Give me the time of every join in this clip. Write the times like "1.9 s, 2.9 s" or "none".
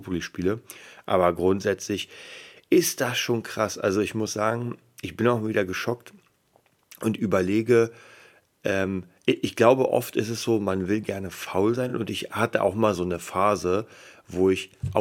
none